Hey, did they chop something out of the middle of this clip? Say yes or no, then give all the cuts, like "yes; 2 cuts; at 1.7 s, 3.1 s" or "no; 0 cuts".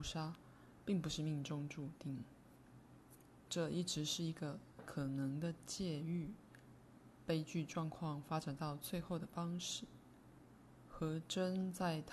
no; 0 cuts